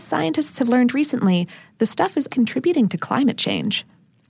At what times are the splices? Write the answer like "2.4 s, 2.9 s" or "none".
2.3 s